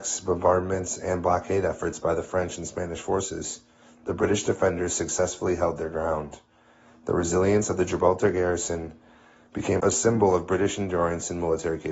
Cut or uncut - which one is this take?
cut